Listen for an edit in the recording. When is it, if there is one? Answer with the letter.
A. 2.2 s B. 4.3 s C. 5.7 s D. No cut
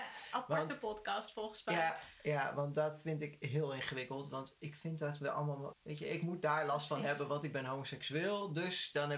C